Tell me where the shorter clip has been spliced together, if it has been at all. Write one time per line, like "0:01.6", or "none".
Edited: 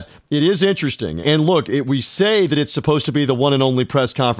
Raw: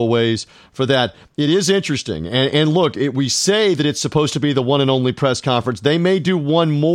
0:01.2